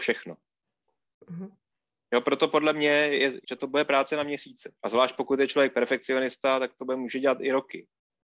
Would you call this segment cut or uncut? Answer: cut